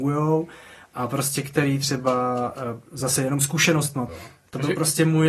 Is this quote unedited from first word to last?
no; 1 cut; at 4.1 s

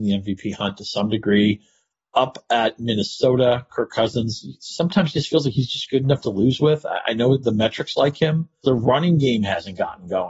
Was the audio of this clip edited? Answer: yes; 1 cut; at 8.6 s

